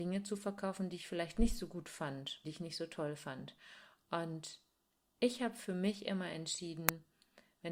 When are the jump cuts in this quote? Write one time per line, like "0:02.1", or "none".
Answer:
0:02.4